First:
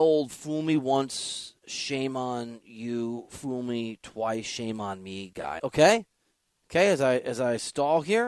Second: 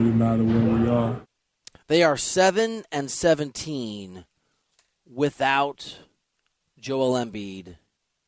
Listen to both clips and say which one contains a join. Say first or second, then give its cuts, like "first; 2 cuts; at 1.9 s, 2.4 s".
first; 1 cut; at 5.6 s